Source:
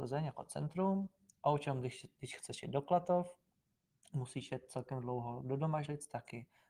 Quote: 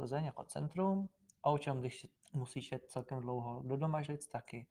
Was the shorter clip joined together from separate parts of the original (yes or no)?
yes